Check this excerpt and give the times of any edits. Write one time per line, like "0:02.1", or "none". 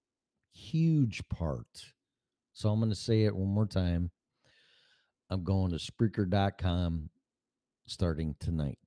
none